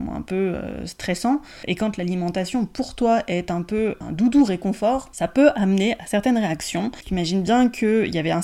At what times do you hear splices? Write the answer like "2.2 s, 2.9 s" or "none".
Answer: 7.0 s